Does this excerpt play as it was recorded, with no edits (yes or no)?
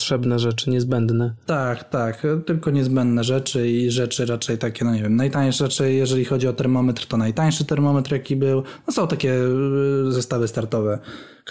yes